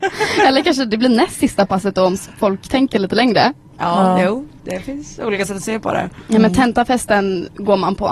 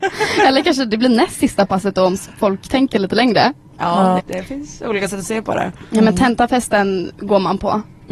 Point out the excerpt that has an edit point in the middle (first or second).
second